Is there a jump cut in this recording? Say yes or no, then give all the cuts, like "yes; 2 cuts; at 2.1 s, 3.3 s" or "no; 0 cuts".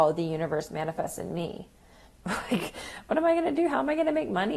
yes; 1 cut; at 2.1 s